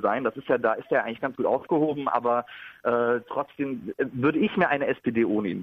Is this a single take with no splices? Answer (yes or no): yes